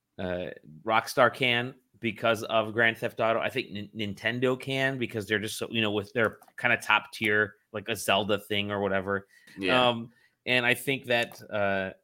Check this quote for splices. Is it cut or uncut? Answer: cut